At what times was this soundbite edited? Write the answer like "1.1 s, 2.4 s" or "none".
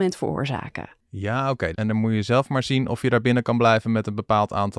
1.7 s